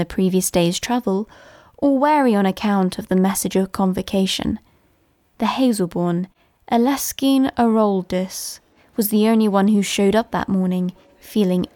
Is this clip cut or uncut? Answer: uncut